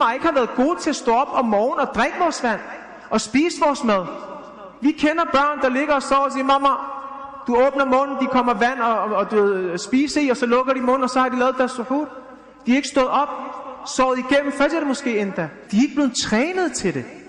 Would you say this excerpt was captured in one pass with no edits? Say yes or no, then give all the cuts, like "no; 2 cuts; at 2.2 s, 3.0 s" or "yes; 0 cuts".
no; 1 cut; at 15.7 s